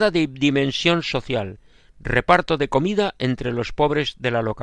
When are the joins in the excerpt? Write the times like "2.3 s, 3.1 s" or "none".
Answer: none